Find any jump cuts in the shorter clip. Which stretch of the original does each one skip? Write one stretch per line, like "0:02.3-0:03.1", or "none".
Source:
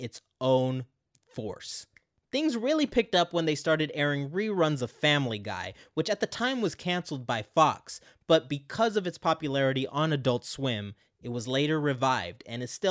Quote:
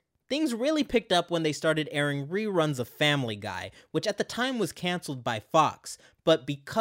none